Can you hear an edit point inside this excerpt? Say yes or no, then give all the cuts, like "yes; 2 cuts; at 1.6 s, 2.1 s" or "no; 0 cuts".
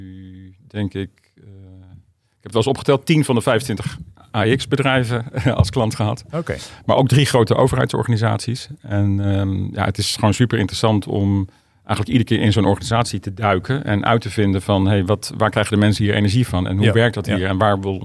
no; 0 cuts